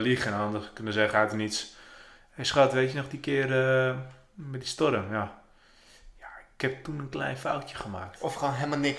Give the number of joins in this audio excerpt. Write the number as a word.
zero